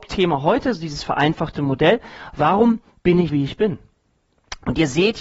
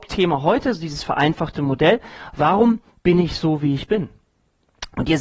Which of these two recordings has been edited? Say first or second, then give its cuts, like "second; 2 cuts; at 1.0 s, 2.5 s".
first; 1 cut; at 3.3 s